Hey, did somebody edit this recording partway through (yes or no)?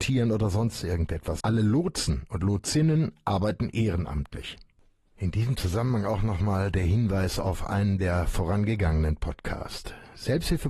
yes